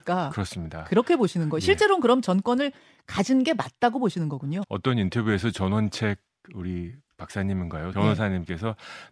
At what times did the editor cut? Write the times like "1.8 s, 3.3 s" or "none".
4.6 s, 7.9 s